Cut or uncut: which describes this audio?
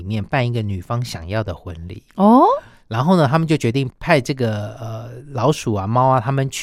cut